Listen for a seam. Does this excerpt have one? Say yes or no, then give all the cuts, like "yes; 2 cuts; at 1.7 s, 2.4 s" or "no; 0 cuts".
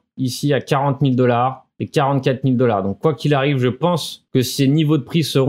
no; 0 cuts